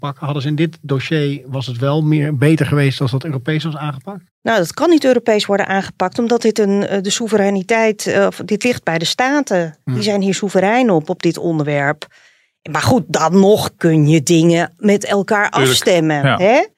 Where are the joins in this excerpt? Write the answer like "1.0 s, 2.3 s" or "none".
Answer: none